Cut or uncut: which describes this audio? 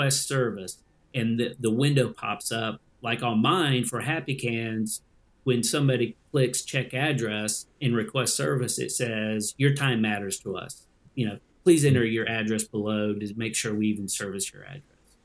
uncut